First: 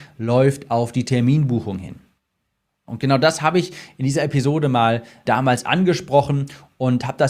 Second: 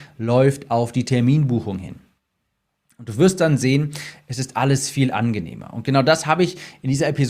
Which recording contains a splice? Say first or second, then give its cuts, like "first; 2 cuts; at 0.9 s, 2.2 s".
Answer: first; 2 cuts; at 2.9 s, 5.2 s